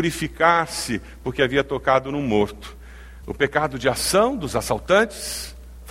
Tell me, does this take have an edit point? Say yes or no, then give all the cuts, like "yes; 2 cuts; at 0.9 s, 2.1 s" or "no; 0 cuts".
yes; 1 cut; at 3.2 s